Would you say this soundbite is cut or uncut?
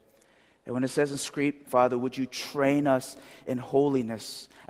cut